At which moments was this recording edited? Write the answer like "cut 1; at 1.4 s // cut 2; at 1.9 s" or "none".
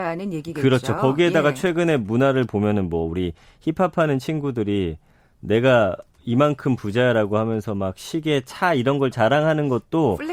none